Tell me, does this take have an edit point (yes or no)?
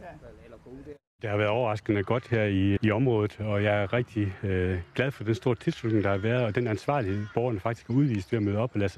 yes